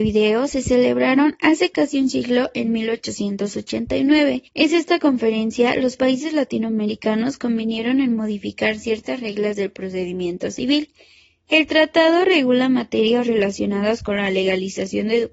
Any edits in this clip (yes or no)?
yes